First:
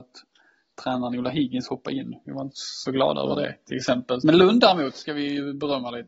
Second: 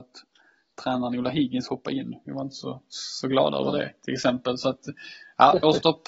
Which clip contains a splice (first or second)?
first